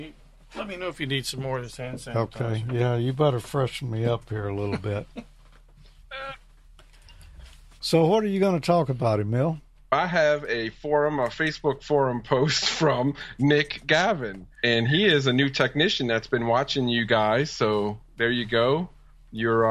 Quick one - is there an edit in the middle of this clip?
no; 0 cuts

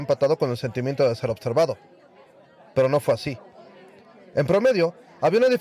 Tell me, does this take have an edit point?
no; 0 cuts

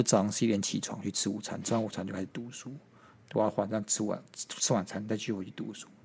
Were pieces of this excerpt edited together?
no; 0 cuts

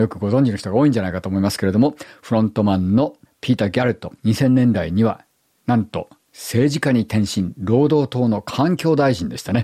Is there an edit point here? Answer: yes; 1 cut; at 4.2 s

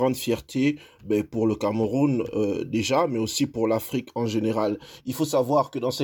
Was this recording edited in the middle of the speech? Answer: yes; 1 cut; at 5.0 s

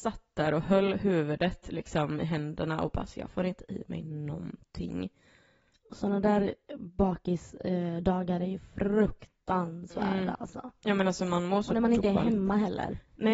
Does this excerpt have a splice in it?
no; 0 cuts

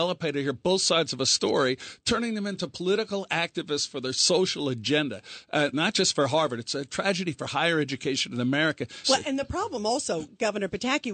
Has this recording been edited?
yes; 2 cuts; at 5.7 s, 9.0 s

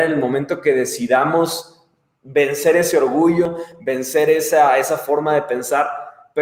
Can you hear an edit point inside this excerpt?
no; 0 cuts

